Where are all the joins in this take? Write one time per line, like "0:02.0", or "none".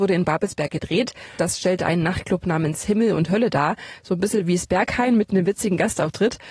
0:01.4